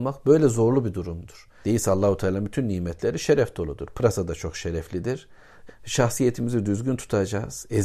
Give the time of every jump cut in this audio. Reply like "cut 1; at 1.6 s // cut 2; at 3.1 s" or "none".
cut 1; at 1.6 s // cut 2; at 5.7 s